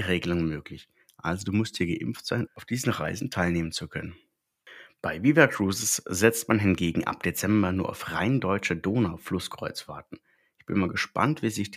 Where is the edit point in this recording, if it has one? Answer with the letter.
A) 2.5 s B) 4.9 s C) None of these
A